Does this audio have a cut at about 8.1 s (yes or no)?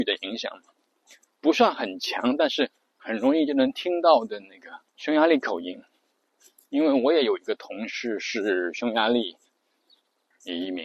no